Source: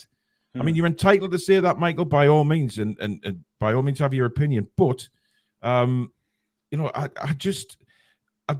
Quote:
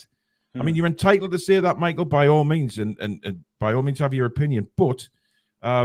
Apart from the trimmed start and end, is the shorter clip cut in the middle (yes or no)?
no